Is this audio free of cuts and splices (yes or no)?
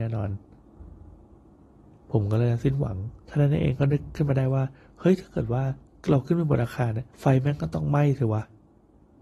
no